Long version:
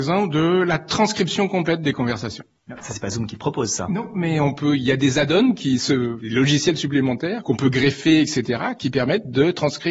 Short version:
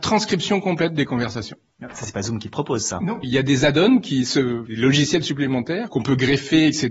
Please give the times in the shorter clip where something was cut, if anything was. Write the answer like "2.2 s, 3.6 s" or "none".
3.2 s